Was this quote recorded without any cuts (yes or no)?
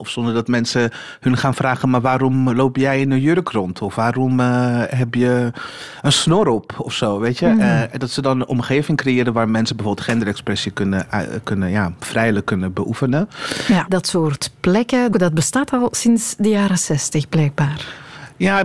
no